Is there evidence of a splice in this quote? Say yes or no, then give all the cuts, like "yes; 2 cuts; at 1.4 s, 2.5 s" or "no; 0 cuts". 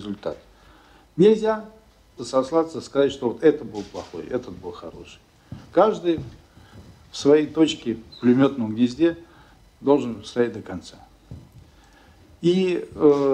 yes; 1 cut; at 2.2 s